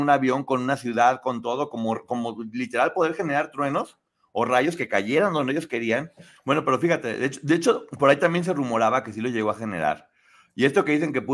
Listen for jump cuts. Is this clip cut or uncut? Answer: cut